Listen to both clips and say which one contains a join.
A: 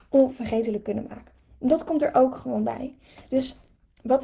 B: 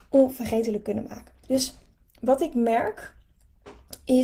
B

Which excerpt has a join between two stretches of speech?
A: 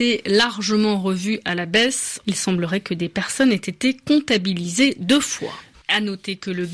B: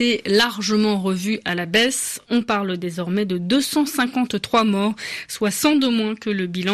A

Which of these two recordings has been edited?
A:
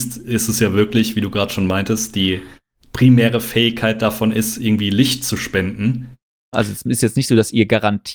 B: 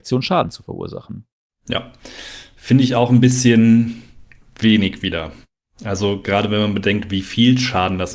A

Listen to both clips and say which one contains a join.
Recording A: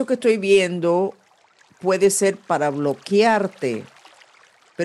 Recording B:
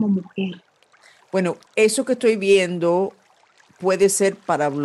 B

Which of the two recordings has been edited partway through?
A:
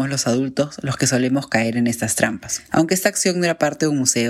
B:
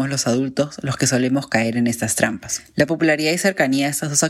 A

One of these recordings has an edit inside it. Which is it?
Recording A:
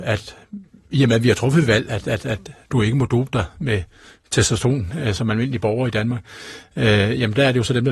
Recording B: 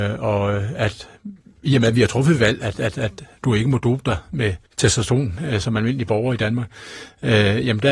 B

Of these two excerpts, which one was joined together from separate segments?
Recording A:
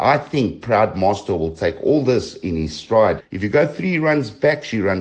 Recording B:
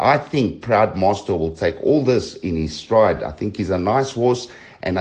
A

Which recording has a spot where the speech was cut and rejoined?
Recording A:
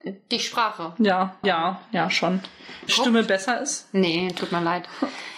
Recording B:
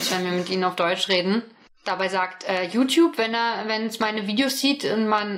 A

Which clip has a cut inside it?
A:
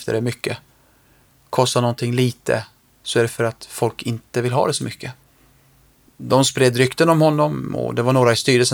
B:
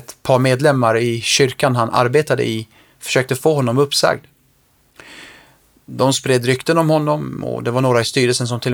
A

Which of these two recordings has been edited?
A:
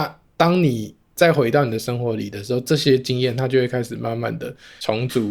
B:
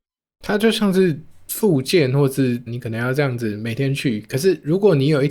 B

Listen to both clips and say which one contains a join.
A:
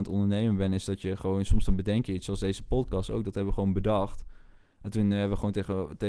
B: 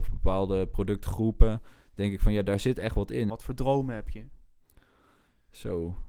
B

